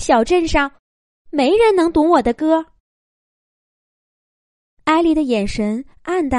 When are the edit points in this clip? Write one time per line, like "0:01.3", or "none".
none